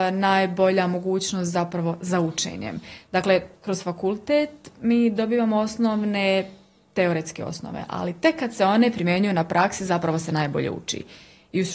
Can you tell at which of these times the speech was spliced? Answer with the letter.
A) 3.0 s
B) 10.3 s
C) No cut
C